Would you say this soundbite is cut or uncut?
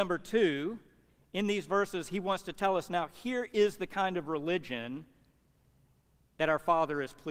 uncut